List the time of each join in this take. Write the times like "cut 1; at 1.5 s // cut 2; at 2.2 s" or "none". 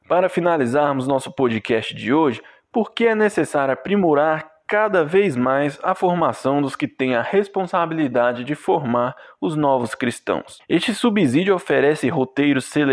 cut 1; at 10.6 s